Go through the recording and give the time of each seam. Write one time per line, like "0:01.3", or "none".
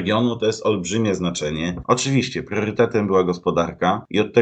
0:01.8